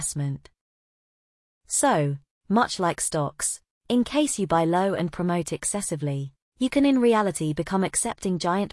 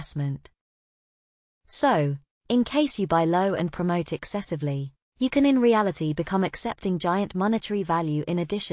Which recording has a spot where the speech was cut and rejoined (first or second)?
second